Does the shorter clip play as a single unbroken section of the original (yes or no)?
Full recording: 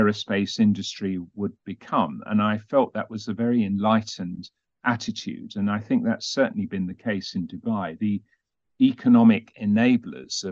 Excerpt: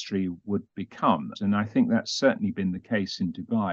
no